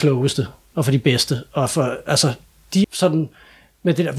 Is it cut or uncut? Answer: cut